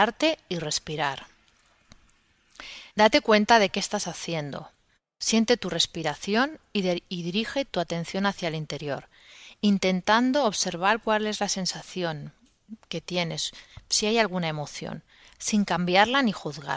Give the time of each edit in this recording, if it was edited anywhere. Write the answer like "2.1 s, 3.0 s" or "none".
2.9 s